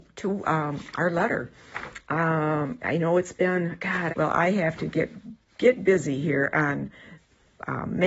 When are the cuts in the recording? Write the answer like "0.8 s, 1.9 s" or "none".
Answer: 4.1 s